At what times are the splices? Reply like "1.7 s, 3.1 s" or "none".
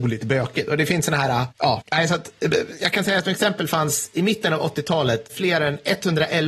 none